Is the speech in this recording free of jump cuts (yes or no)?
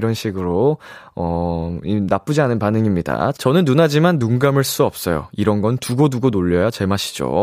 no